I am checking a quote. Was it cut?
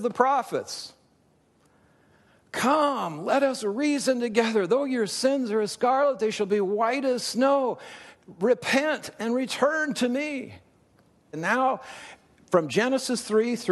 yes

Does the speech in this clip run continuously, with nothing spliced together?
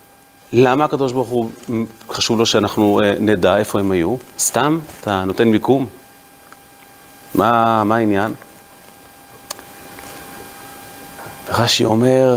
no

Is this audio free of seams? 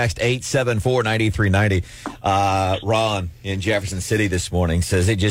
yes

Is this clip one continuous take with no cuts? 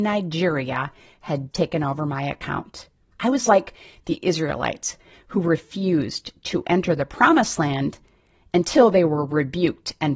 no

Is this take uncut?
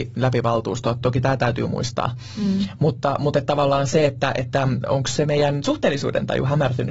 yes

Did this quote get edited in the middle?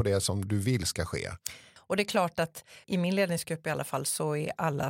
yes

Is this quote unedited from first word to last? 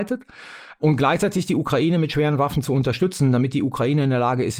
yes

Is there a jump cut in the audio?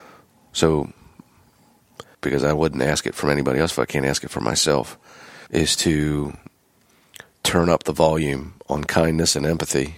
yes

